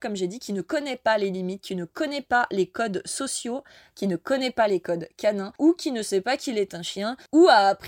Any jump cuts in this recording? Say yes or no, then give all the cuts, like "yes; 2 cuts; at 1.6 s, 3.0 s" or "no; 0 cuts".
no; 0 cuts